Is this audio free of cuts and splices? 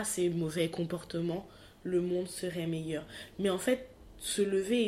yes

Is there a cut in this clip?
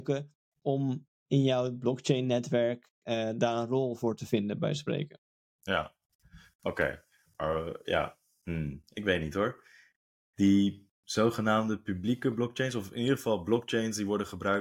no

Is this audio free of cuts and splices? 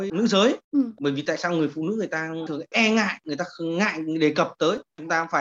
yes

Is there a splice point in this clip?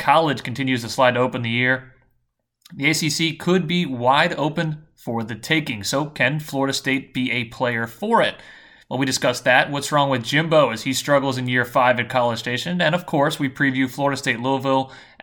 no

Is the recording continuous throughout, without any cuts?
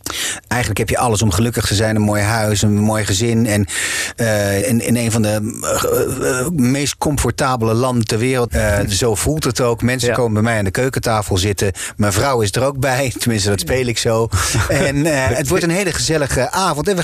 no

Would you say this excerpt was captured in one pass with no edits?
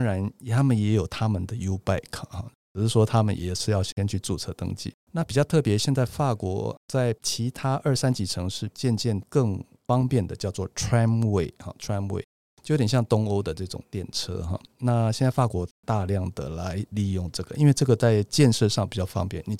yes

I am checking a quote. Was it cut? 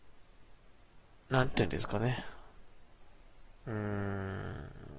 no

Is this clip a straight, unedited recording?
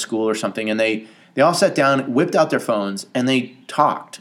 yes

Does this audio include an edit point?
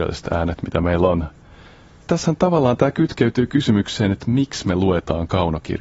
no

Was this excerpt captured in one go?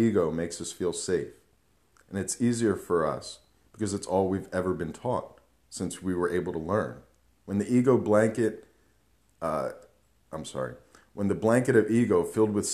no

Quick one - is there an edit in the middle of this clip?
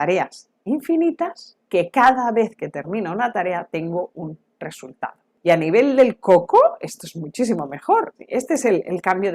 yes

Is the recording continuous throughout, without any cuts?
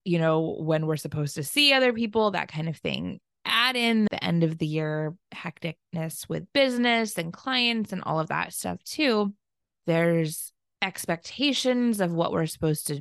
no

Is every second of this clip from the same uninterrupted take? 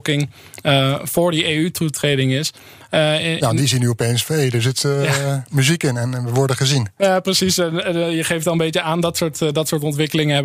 yes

